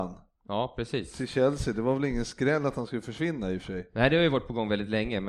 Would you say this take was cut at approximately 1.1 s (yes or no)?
no